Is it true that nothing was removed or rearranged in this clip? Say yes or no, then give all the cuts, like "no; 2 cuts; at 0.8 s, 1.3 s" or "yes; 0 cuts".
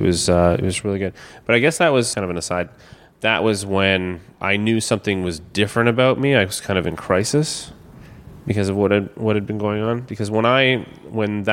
no; 1 cut; at 2.1 s